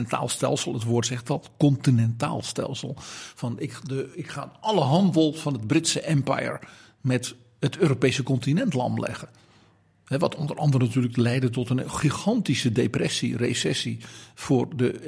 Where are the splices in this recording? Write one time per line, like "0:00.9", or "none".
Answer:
none